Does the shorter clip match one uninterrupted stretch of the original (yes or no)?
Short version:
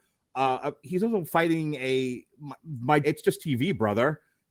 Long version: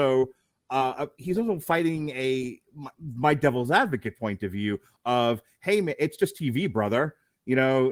no